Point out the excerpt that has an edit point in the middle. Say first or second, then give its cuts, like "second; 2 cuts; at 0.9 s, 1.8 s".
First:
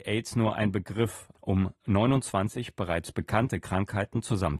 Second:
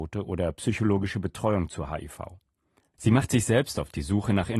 first; 1 cut; at 1.3 s